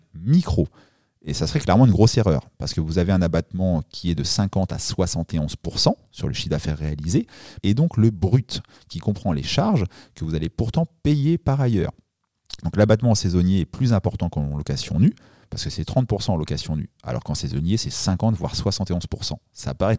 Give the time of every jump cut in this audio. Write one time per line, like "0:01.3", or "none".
0:07.6